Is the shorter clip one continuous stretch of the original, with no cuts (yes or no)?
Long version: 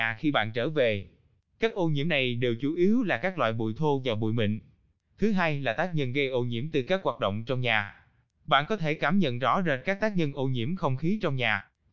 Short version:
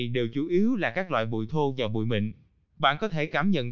no